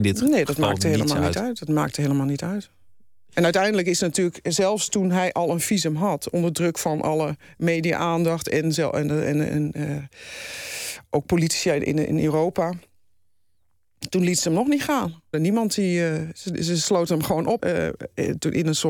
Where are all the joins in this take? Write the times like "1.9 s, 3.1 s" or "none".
15.3 s, 17.6 s

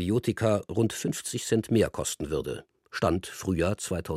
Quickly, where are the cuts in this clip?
none

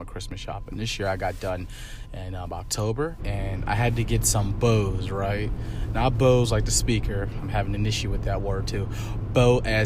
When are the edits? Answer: 3.2 s

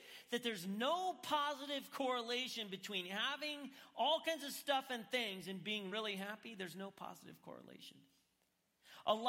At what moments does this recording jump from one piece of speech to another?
none

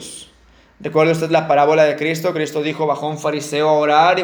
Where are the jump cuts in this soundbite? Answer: none

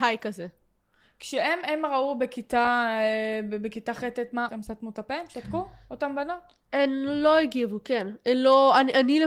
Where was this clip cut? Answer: 4.5 s

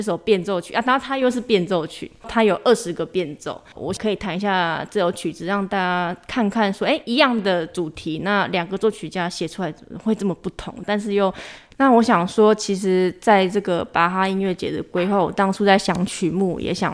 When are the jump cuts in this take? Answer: 11.7 s

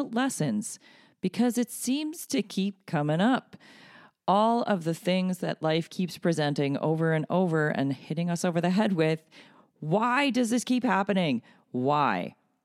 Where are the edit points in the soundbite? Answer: none

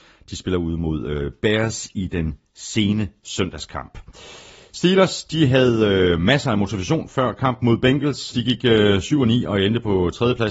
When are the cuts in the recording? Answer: 8.3 s

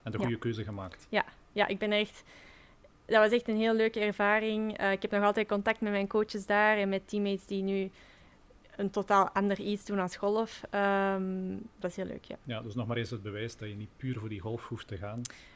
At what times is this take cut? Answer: 11.8 s

